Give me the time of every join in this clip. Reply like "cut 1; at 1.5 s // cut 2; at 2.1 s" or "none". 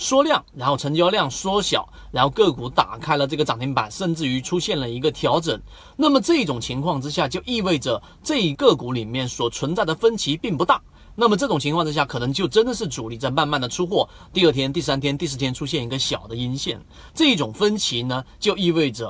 cut 1; at 8.5 s // cut 2; at 17.1 s